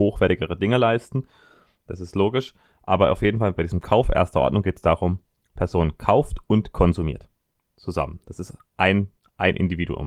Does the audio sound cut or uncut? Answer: uncut